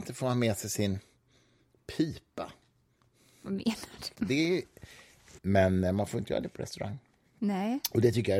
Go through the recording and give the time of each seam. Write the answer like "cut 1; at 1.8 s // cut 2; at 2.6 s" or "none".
cut 1; at 4.1 s // cut 2; at 5.4 s